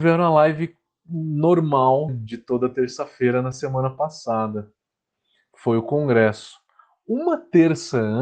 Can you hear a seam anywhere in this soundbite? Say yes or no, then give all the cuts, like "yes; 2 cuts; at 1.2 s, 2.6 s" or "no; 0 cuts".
yes; 1 cut; at 2.1 s